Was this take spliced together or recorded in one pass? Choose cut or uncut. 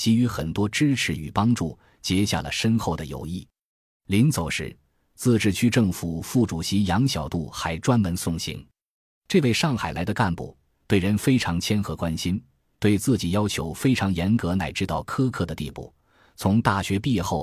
uncut